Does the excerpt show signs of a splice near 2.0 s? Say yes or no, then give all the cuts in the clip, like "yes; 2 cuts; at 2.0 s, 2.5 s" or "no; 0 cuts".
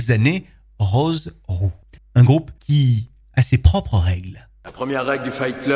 yes; 1 cut; at 2.0 s